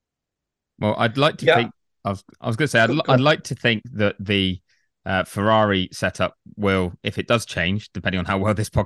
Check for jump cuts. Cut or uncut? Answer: cut